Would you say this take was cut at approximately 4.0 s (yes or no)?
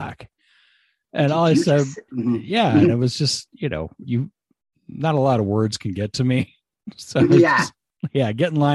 yes